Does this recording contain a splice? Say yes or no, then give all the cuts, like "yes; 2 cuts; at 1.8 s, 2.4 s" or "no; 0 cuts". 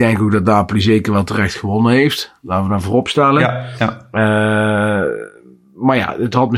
no; 0 cuts